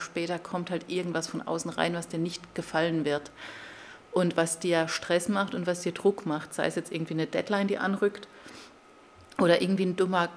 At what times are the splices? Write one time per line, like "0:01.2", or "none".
none